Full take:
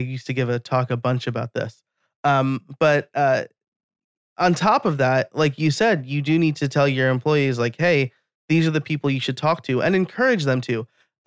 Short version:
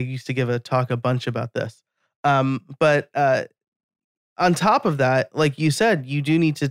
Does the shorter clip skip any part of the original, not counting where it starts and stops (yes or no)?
no